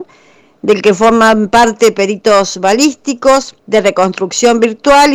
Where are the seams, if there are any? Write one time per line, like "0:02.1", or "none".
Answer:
0:03.6